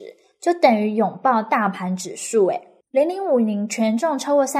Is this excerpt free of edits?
yes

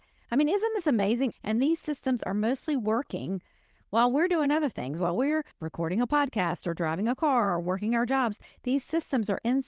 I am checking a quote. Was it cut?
yes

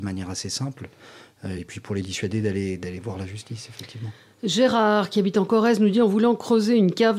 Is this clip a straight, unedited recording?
yes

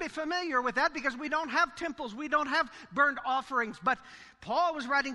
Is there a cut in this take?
no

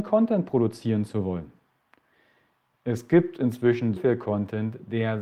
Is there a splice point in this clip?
yes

